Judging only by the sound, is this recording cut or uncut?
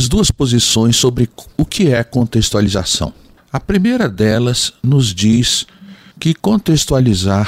uncut